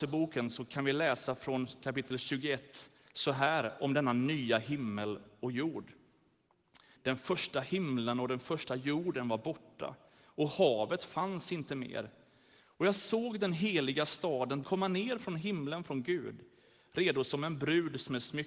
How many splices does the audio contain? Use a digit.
2